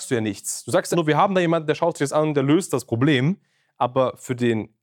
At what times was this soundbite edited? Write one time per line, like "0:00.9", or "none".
0:00.9

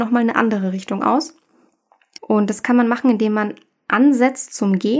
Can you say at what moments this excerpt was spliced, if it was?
0:02.2

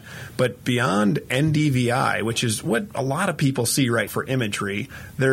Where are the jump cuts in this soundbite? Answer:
0:04.1

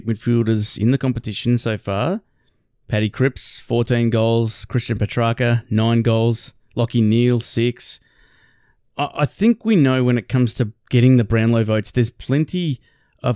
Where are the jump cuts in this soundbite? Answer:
none

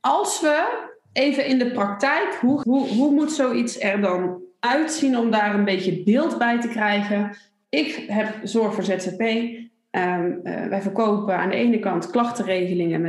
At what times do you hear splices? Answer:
0:02.6

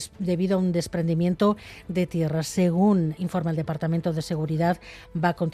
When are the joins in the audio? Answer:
0:03.2

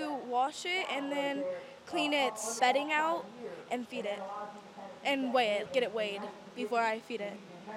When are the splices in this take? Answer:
0:02.6
0:05.6

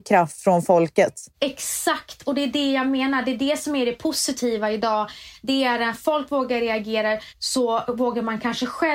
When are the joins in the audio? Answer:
0:07.3

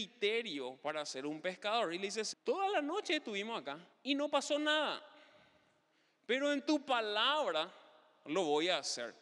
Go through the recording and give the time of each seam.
0:02.3
0:03.9

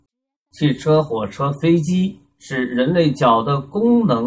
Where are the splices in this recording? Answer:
none

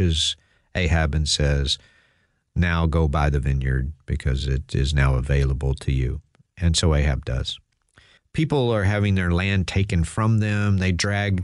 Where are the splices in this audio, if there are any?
0:08.2

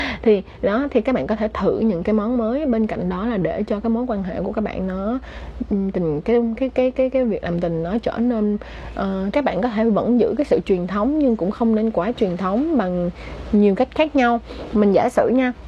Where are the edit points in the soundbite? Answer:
0:09.3

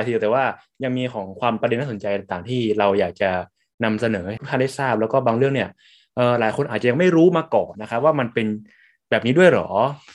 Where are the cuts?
0:07.7

